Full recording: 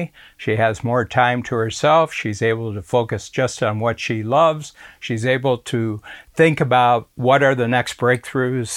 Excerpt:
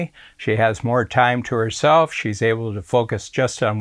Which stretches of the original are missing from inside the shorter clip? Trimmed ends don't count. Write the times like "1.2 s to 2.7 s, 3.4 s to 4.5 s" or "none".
none